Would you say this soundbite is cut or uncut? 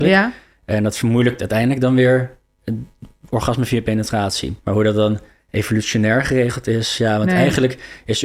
cut